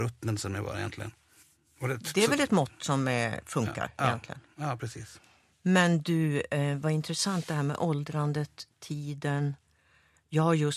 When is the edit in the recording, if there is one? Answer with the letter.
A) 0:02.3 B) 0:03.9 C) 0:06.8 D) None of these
D